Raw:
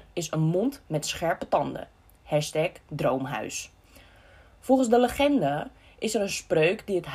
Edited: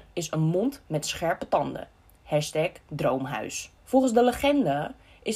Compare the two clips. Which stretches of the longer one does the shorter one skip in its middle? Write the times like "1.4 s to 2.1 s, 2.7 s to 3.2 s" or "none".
3.8 s to 4.5 s